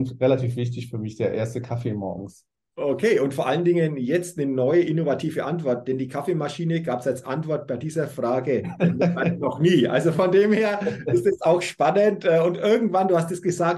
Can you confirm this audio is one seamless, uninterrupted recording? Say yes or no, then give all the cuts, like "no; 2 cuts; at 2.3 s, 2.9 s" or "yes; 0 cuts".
yes; 0 cuts